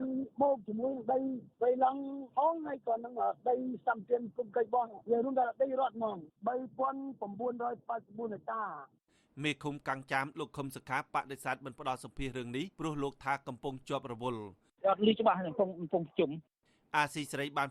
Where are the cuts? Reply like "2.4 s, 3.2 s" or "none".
12.7 s